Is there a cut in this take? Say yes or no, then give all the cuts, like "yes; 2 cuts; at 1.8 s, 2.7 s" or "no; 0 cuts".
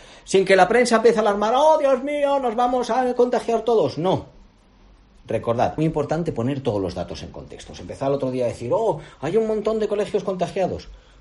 yes; 1 cut; at 5.8 s